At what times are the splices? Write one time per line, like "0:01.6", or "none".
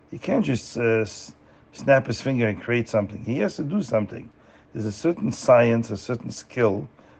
none